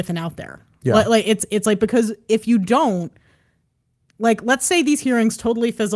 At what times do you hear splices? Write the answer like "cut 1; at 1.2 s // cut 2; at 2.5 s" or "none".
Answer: none